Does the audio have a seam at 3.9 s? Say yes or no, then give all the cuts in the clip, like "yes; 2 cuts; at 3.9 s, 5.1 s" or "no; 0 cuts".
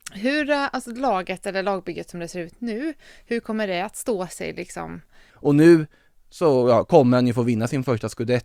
no; 1 cut; at 5.3 s